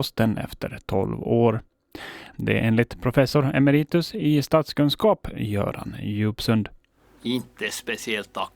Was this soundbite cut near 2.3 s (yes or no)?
yes